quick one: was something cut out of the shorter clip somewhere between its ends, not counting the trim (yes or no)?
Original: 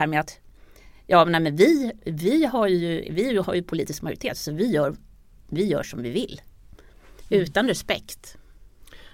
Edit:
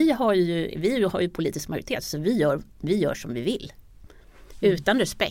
yes